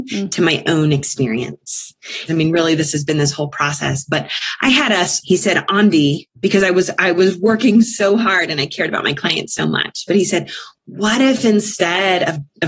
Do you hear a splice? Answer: yes; 2 cuts; at 2.3 s, 5.2 s

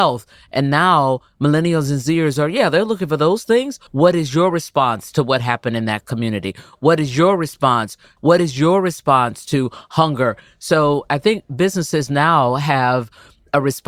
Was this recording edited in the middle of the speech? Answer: yes; 2 cuts; at 3.9 s, 8.2 s

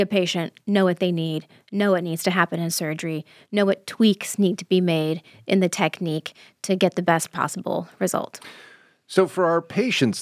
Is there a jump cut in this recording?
no; 0 cuts

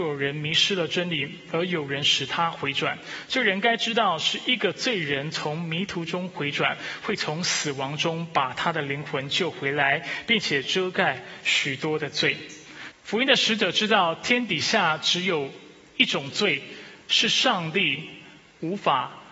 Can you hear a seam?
yes; 1 cut; at 12.9 s

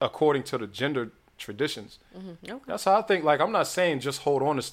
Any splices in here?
yes; 1 cut; at 2.4 s

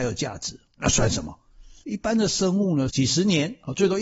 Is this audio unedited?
no; 2 cuts; at 1.8 s, 2.9 s

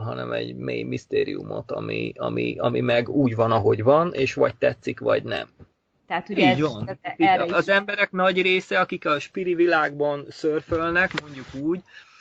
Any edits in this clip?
yes; 1 cut; at 5.9 s

